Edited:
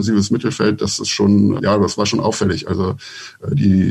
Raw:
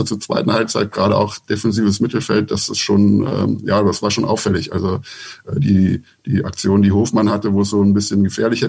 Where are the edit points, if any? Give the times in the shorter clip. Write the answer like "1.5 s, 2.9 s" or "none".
1.6 s